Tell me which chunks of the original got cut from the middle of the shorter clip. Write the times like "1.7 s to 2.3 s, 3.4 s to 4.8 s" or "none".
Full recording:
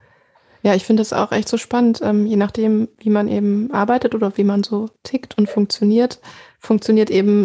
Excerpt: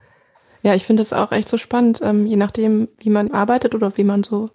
3.3 s to 3.7 s